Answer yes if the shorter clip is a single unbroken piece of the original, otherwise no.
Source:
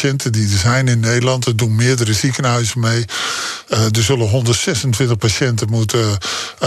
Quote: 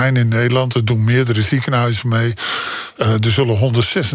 yes